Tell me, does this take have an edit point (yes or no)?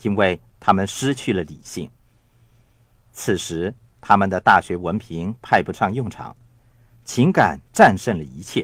no